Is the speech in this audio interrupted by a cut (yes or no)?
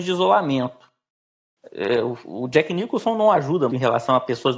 yes